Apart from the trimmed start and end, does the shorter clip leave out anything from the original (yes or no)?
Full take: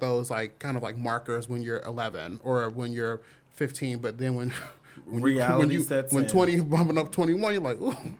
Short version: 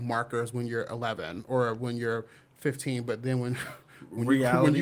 no